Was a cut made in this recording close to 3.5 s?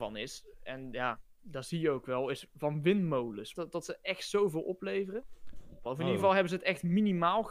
yes; 2 cuts; at 3.5 s, 5.9 s

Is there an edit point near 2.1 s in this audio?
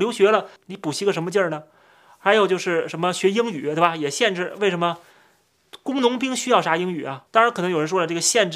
no; 1 cut; at 7.3 s

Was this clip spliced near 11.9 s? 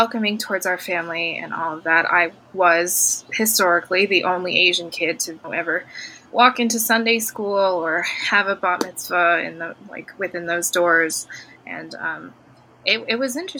no; 1 cut; at 5.4 s

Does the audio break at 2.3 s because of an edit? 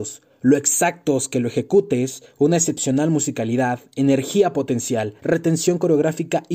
no; 1 cut; at 5.2 s

